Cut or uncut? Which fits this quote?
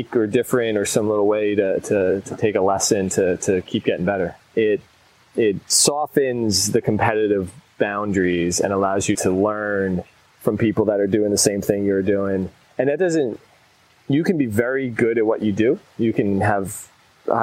cut